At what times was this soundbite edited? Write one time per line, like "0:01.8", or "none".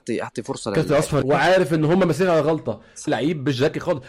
0:01.2
0:03.1